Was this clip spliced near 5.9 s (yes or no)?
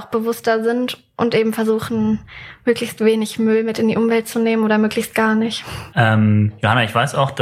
yes